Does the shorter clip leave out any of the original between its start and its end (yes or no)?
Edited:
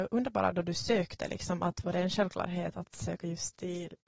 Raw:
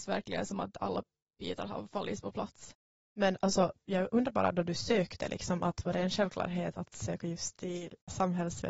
no